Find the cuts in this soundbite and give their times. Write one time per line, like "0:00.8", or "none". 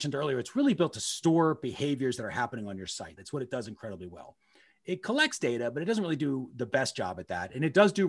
0:03.2

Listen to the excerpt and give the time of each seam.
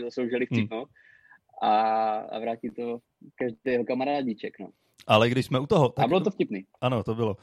none

